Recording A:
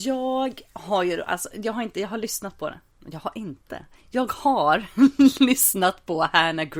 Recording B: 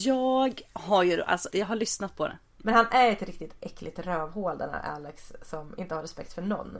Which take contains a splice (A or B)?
B